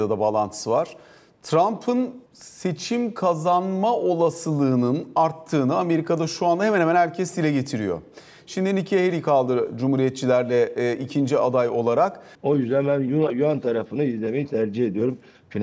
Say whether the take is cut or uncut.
cut